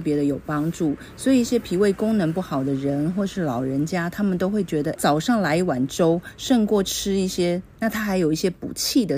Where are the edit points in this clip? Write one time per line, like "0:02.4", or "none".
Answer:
0:04.9
0:07.8